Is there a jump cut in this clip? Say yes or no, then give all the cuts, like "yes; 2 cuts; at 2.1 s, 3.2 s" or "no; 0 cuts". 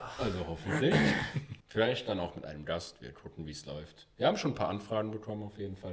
yes; 1 cut; at 1.6 s